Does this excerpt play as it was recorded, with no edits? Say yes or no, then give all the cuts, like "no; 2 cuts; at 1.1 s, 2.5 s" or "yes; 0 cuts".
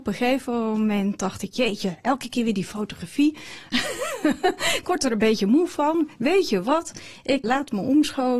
no; 1 cut; at 7.4 s